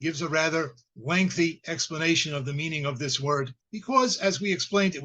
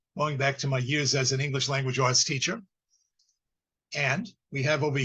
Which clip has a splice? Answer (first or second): first